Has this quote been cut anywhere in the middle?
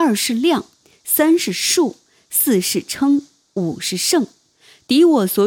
no; 0 cuts

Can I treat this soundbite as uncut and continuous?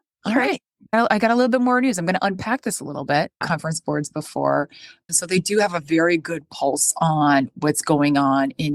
no; 2 cuts; at 3.4 s, 5.1 s

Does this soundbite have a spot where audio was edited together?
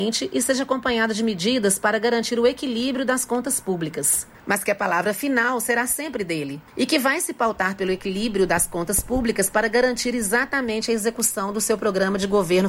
yes; 2 cuts; at 4.3 s, 6.7 s

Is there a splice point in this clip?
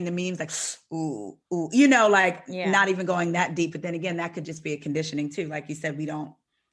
no; 0 cuts

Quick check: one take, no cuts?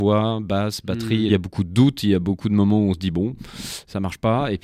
no; 1 cut; at 1.3 s

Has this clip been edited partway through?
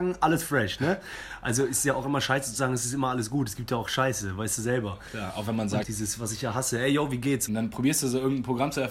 yes; 2 cuts; at 5.8 s, 7.5 s

